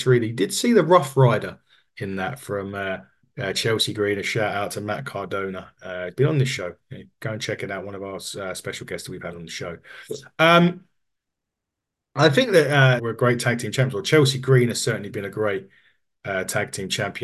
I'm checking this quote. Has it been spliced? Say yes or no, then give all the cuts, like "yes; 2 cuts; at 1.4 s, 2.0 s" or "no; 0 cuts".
yes; 1 cut; at 13.0 s